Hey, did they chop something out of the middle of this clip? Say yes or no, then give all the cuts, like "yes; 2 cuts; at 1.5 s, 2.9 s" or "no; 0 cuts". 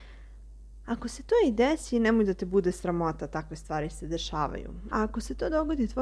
yes; 1 cut; at 4.9 s